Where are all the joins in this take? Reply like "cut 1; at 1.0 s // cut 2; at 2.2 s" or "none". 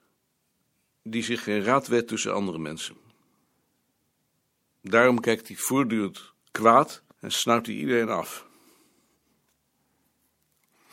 cut 1; at 7.1 s